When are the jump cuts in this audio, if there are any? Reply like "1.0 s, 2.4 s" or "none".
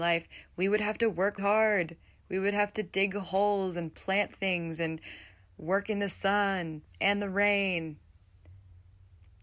1.4 s